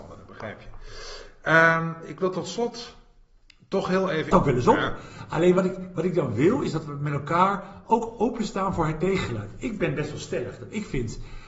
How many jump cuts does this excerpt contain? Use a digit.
1